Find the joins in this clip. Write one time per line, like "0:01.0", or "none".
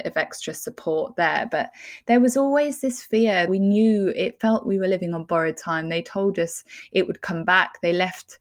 0:03.5